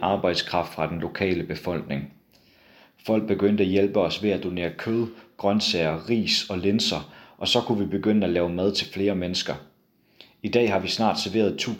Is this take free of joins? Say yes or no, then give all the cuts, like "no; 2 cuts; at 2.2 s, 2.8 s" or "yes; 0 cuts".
yes; 0 cuts